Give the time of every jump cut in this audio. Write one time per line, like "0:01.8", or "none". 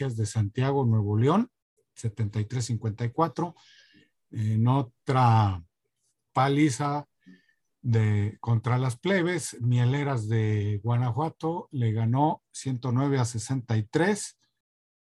none